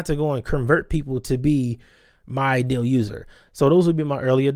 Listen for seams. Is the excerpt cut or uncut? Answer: cut